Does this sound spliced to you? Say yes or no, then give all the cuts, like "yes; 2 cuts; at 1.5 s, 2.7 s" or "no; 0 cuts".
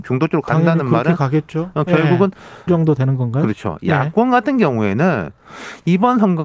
yes; 1 cut; at 2.7 s